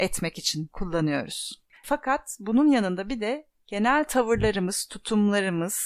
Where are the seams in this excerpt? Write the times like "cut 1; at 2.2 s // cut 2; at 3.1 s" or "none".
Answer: cut 1; at 1.7 s